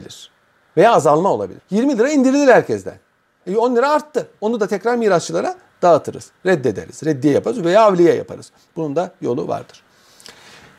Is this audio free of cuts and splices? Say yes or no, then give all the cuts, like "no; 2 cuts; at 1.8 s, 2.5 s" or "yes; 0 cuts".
no; 2 cuts; at 1.6 s, 3.4 s